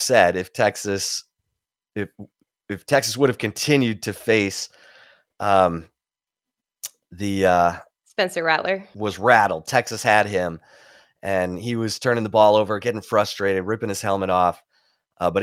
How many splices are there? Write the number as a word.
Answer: one